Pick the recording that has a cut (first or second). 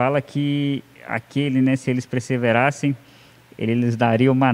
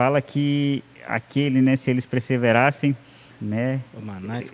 second